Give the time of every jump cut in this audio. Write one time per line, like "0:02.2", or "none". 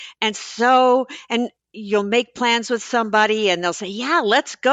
0:01.6

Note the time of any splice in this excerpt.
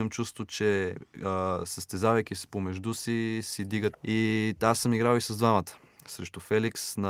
0:03.9

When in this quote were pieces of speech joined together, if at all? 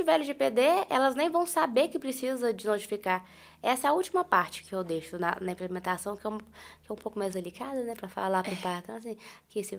none

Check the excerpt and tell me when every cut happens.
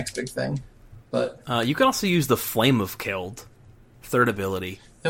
0:01.1

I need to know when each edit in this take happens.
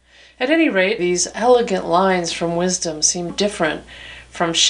0:01.0
0:03.3

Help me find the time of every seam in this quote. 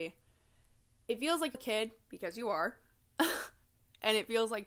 0:01.5

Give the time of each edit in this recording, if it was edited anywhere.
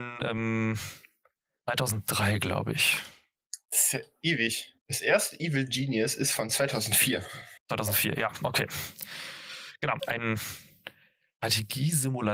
0:10.0

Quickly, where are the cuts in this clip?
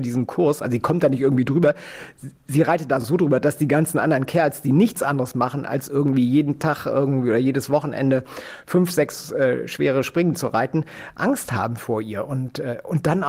none

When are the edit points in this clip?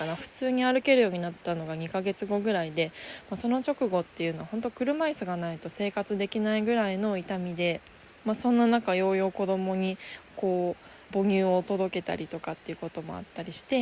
0:11.0

